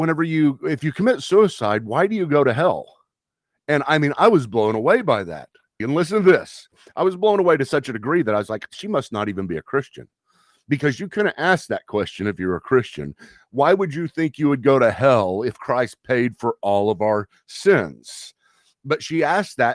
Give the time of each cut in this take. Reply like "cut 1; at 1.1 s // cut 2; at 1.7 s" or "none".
cut 1; at 5.8 s // cut 2; at 8.7 s